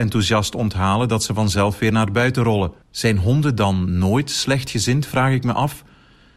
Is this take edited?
yes; 1 cut; at 2.8 s

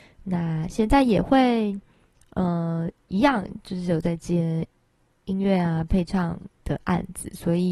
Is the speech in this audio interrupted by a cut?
no; 0 cuts

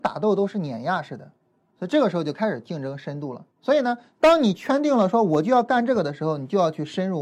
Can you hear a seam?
yes; 2 cuts; at 1.7 s, 3.5 s

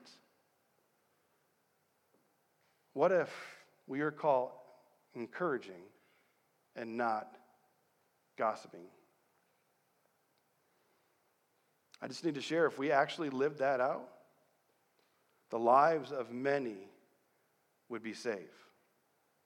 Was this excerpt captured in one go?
yes; 0 cuts

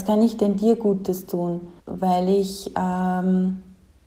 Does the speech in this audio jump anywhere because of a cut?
yes; 1 cut; at 1.8 s

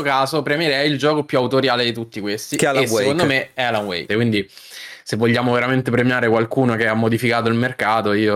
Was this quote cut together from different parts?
yes; 1 cut; at 4.1 s

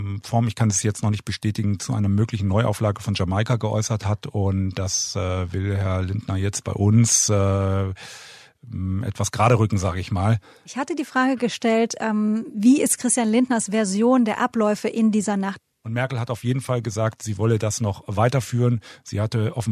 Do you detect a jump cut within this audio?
no; 0 cuts

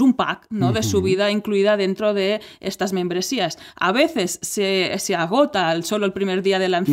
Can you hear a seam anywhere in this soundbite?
no; 0 cuts

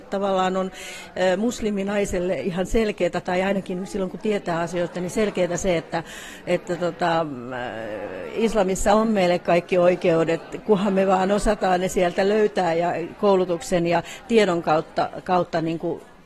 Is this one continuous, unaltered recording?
yes; 0 cuts

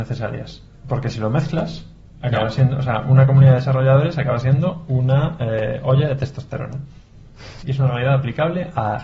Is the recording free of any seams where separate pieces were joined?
no; 1 cut; at 7.6 s

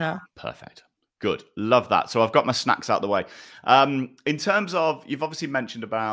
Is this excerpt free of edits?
yes; 0 cuts

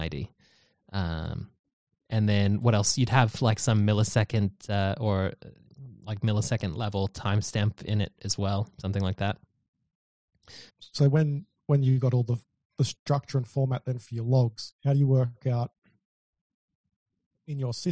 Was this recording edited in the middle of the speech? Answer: yes; 2 cuts; at 10.7 s, 14.8 s

